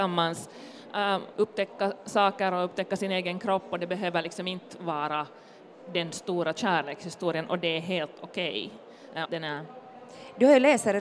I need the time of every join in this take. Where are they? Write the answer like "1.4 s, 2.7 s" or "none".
1.3 s, 9.3 s

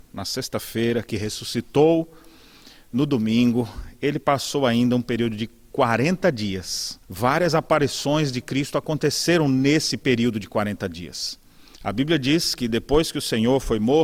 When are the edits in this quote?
7.0 s, 11.7 s

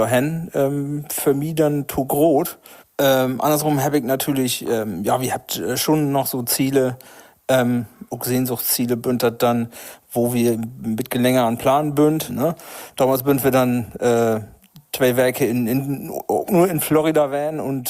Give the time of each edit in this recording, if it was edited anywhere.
2.8 s, 12.3 s

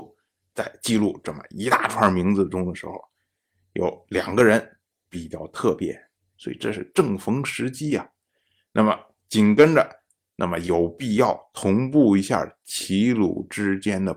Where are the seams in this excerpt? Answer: 6.3 s, 10.2 s

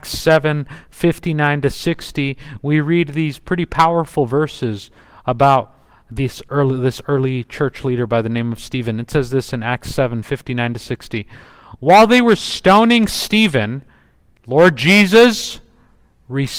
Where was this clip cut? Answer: 14.4 s

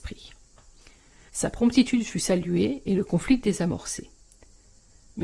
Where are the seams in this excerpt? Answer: 1.3 s

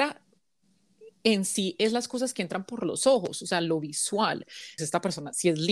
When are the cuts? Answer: 4.8 s

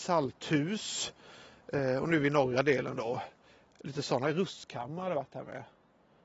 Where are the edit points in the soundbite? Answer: none

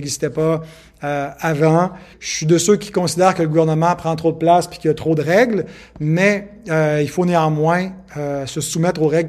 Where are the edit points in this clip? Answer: 2.1 s

